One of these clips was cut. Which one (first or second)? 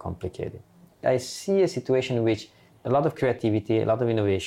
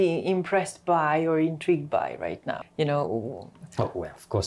second